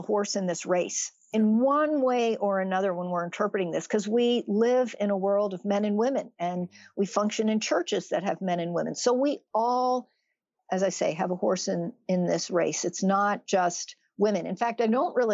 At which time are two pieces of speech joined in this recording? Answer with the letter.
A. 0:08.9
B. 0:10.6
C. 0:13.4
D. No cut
D